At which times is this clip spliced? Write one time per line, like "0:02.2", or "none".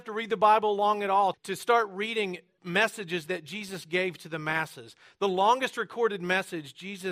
0:01.3